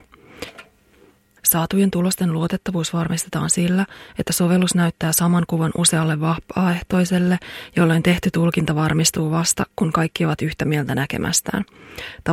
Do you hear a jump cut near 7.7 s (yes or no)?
no